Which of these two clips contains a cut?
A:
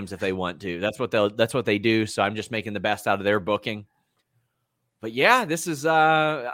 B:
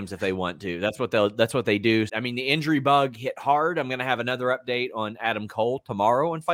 B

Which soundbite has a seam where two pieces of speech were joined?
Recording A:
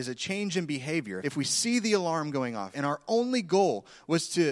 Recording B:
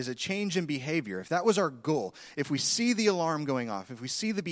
A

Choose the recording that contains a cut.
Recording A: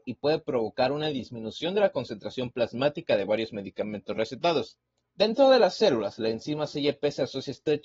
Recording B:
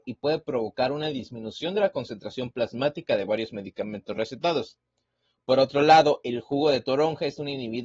A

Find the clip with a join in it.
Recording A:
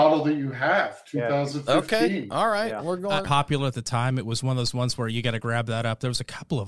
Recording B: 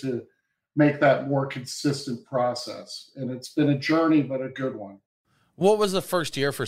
A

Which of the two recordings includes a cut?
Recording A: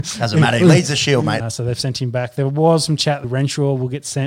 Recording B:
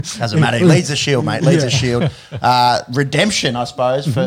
A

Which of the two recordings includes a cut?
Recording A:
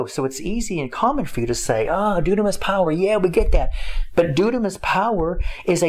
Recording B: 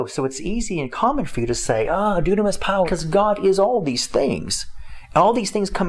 B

